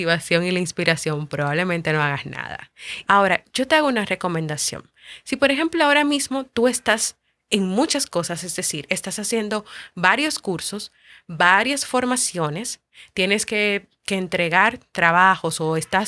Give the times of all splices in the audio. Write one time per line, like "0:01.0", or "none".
0:03.0